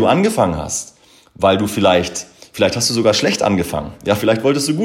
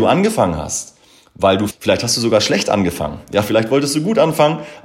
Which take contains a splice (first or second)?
second